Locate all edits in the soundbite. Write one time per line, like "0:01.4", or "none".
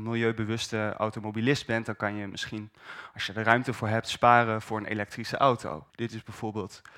0:05.9